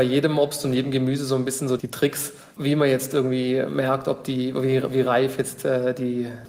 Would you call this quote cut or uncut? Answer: uncut